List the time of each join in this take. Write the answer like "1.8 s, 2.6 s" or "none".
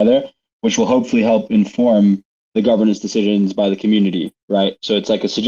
none